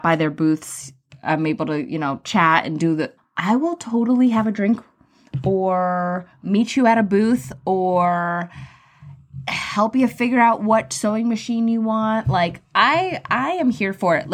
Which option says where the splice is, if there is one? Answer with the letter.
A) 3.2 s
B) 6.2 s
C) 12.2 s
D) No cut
A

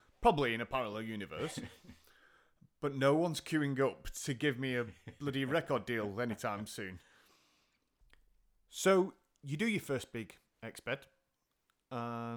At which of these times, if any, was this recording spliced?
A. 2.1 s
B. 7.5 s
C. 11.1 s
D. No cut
D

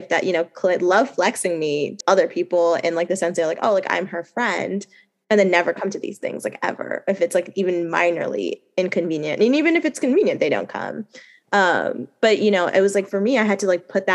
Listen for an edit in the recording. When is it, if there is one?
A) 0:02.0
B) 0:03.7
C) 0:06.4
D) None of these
A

